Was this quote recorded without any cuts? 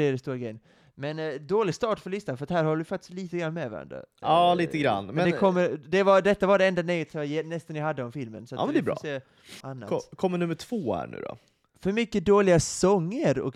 no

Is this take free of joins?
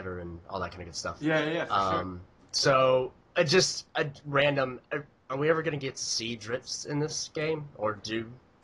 yes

